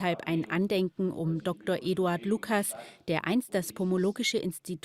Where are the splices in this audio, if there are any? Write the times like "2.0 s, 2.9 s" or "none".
none